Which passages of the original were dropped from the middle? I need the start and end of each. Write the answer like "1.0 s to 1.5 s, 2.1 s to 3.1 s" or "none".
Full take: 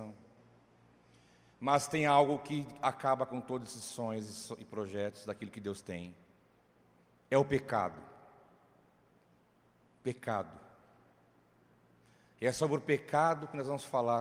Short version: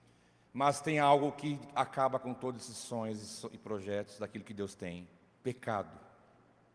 6.4 s to 10.0 s